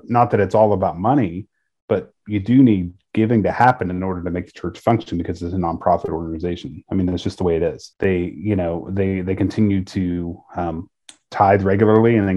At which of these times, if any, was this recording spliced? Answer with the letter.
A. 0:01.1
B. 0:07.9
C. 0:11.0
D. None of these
B